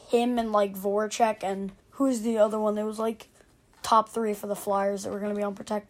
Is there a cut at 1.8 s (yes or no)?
yes